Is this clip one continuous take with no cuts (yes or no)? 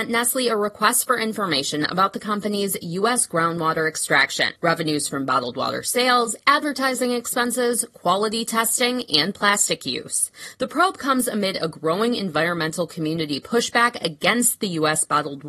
yes